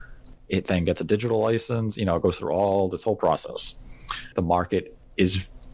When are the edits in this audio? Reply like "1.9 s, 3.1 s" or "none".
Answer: 4.3 s

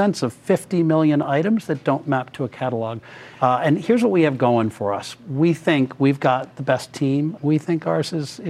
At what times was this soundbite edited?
3.3 s, 7.4 s

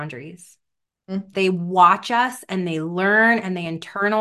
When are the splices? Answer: 1.3 s

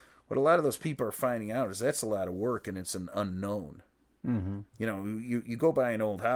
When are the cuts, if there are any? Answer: 4.7 s

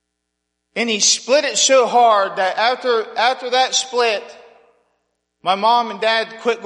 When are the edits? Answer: none

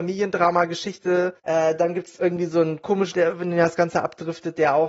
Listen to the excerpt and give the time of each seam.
1.4 s, 3.1 s

